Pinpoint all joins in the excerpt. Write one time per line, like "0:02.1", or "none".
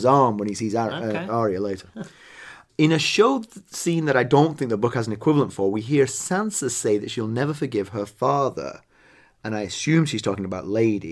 none